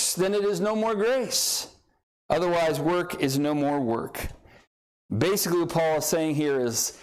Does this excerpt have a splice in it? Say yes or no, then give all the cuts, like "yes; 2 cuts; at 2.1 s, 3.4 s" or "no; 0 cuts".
no; 0 cuts